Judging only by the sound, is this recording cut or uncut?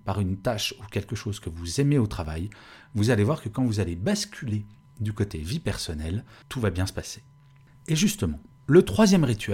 uncut